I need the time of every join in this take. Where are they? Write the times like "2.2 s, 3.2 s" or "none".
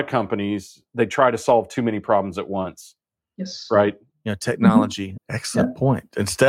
4.1 s, 5.2 s